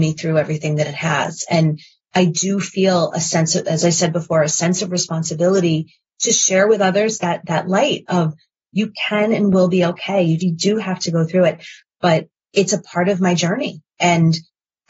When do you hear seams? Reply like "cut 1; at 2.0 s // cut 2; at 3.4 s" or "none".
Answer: cut 1; at 10.4 s // cut 2; at 11.9 s